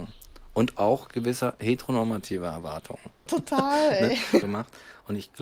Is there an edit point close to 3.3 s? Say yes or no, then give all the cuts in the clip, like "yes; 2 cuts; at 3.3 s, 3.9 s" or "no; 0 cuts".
yes; 2 cuts; at 3.3 s, 4.4 s